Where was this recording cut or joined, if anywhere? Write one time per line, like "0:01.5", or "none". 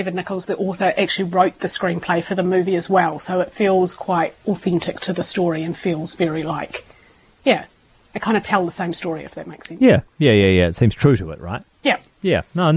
none